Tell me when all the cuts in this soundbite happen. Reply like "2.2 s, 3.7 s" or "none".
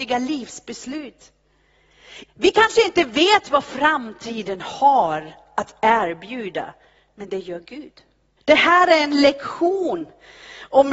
2.3 s, 8.4 s